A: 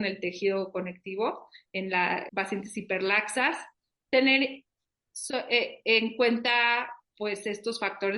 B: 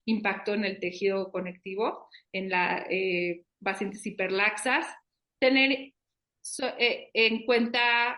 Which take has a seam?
A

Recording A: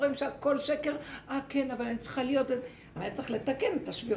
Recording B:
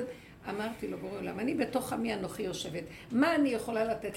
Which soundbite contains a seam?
A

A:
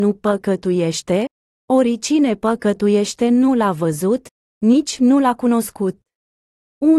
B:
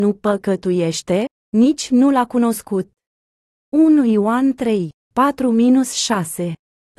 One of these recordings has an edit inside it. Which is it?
B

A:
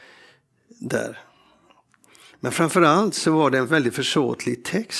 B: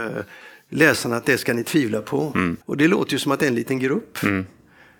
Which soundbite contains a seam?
B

